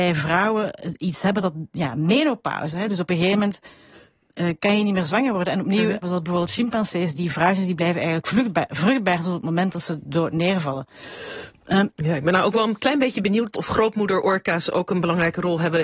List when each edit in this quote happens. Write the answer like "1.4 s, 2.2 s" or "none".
6.0 s, 11.9 s, 13.5 s